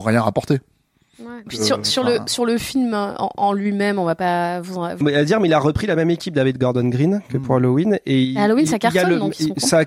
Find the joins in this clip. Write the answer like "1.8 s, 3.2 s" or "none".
1.5 s, 5.0 s